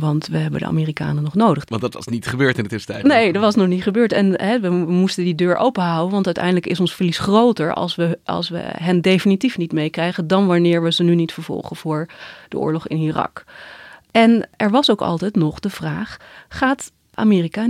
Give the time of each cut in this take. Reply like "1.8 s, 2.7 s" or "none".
1.7 s

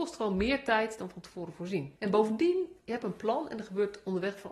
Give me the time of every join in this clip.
none

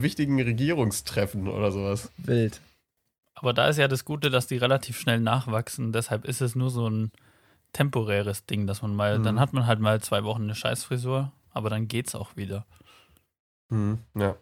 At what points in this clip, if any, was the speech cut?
none

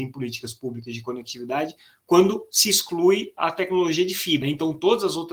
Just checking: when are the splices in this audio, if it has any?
4.4 s

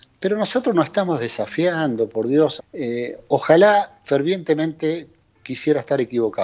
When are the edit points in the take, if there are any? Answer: 2.6 s, 4.0 s

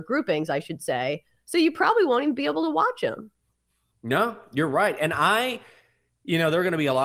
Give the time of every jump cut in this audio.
none

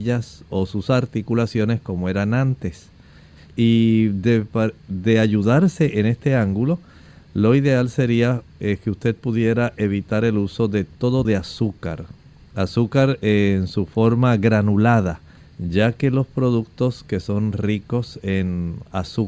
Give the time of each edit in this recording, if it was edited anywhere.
3.5 s, 11.2 s, 15.4 s

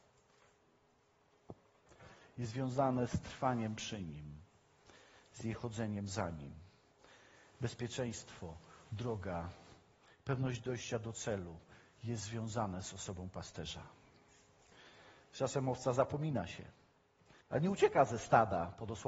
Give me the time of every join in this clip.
8.8 s, 17.4 s

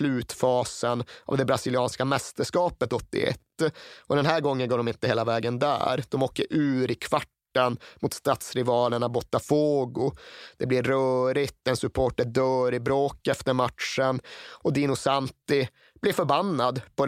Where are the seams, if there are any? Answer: none

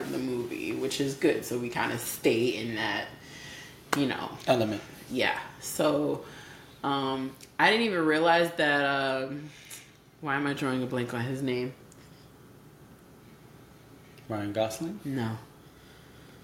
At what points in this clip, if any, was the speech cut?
none

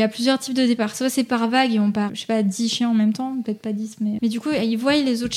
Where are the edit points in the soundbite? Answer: 2.1 s, 4.2 s

